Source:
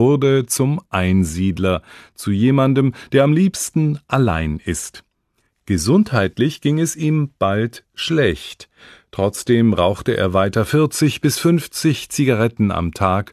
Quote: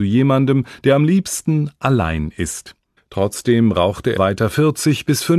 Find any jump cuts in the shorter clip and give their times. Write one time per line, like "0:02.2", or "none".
0:03.0
0:04.2